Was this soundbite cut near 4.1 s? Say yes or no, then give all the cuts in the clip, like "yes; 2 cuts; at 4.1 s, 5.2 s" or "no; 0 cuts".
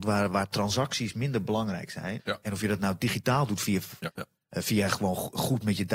yes; 2 cuts; at 2.2 s, 4.1 s